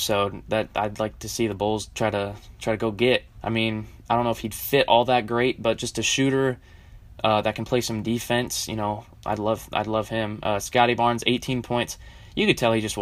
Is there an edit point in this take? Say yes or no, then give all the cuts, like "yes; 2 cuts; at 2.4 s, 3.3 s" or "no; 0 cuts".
yes; 1 cut; at 3.4 s